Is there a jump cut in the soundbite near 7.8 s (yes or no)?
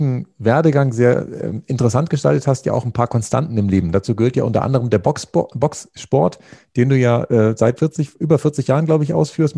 yes